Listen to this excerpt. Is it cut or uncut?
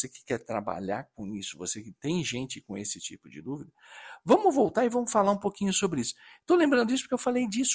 uncut